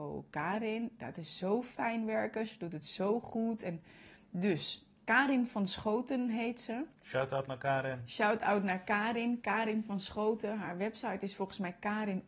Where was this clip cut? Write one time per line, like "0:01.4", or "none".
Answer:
0:06.9